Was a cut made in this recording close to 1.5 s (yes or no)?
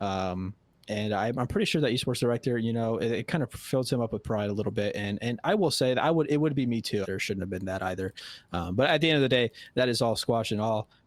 no